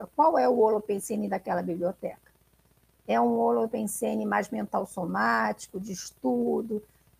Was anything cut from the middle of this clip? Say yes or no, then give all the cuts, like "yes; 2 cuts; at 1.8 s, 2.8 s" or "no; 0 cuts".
no; 0 cuts